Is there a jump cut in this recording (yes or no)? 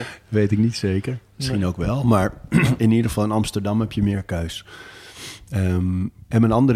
no